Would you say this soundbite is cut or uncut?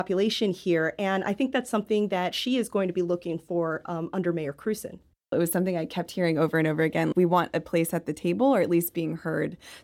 cut